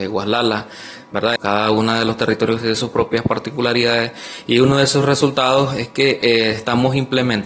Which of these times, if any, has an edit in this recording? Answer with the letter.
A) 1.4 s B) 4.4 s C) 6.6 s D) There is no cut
A